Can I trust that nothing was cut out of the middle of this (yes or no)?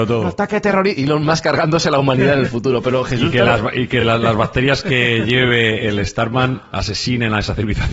yes